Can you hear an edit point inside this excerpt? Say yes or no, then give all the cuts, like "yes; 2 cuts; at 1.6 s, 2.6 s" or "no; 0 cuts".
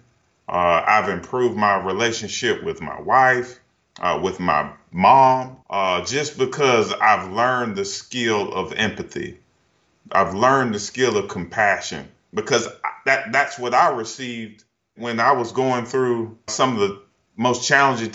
yes; 2 cuts; at 5.6 s, 16.5 s